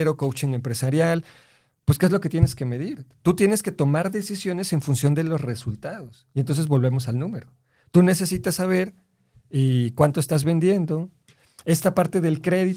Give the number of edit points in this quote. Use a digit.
0